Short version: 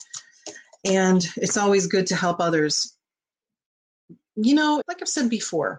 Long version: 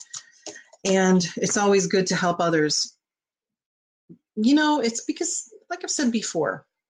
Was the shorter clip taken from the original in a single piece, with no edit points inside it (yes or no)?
no